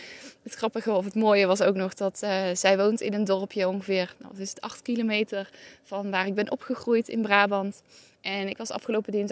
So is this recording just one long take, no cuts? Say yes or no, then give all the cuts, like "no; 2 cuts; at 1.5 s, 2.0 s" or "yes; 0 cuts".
yes; 0 cuts